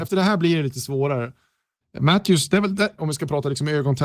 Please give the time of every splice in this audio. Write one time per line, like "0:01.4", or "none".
0:01.8
0:03.0